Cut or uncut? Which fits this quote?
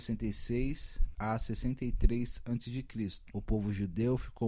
cut